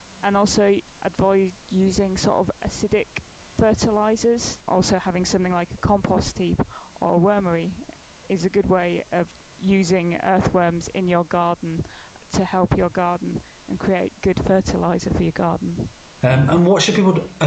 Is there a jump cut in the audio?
yes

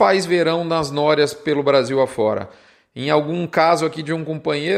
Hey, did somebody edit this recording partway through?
no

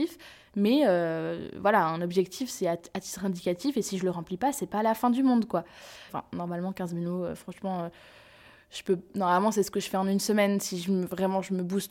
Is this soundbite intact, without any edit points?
no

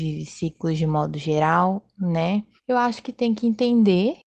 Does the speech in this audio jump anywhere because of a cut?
yes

